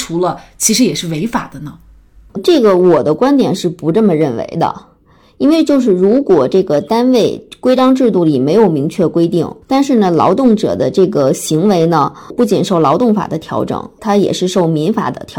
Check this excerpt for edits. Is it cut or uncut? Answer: cut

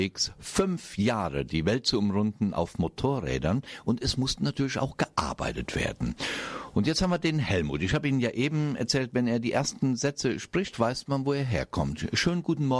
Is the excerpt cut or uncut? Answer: uncut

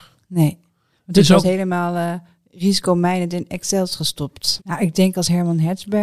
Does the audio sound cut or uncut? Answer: cut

